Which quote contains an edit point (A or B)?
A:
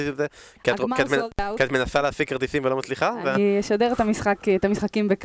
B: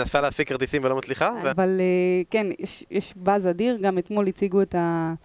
B